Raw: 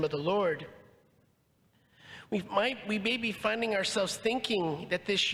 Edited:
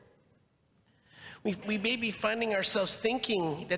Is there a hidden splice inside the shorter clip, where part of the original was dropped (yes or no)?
yes